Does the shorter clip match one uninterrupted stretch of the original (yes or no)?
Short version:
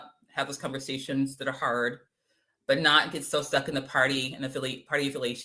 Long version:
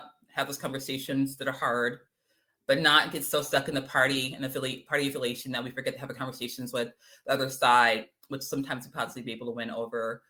yes